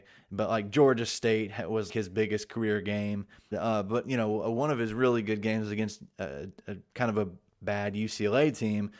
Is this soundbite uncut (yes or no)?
no